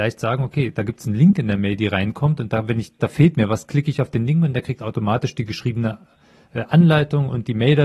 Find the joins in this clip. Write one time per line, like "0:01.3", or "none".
0:03.0